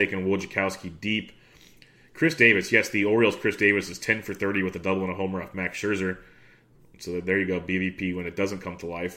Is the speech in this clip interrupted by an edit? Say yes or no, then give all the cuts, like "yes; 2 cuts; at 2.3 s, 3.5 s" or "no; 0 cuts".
no; 0 cuts